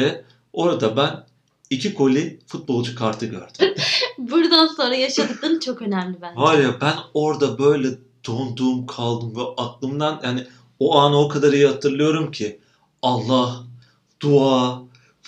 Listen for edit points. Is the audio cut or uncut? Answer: cut